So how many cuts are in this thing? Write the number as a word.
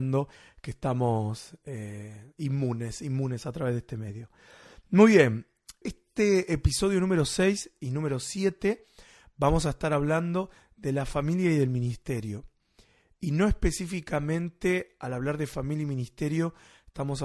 one